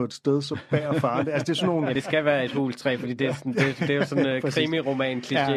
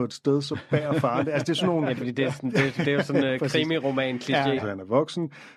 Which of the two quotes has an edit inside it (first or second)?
second